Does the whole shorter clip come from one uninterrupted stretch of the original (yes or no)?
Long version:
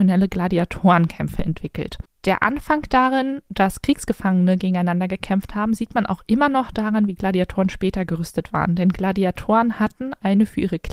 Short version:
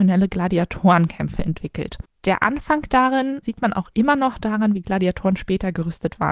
no